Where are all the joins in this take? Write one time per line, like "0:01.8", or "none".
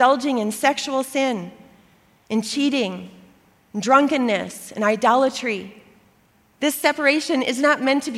none